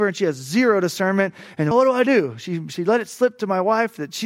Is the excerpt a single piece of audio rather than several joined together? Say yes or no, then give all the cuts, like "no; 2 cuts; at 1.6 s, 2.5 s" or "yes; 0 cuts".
no; 1 cut; at 1.7 s